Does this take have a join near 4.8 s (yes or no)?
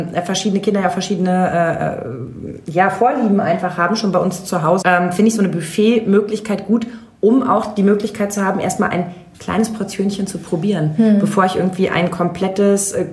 yes